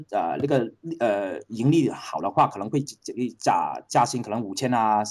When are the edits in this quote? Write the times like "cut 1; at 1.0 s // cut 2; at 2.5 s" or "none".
none